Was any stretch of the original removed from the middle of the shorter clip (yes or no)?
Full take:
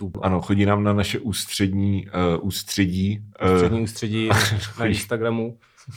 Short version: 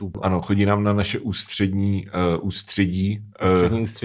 no